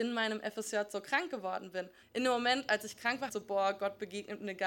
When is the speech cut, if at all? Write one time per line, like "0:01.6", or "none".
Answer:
0:02.0
0:03.3

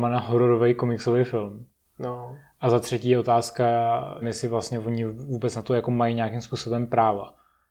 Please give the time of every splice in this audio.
0:04.2

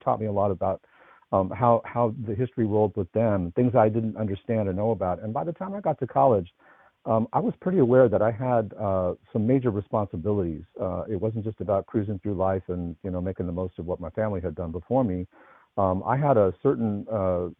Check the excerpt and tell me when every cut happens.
none

